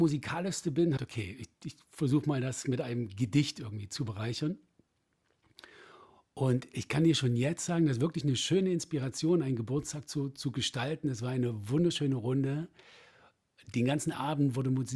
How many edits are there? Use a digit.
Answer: 1